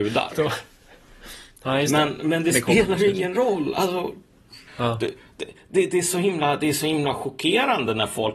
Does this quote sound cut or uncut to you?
cut